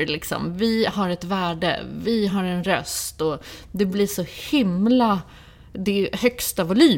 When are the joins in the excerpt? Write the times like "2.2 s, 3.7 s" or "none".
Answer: none